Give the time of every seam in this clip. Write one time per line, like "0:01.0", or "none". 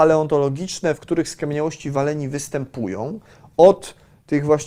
none